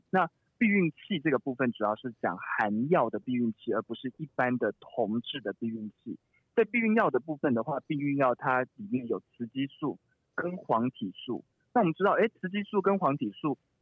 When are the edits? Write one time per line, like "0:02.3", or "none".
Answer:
none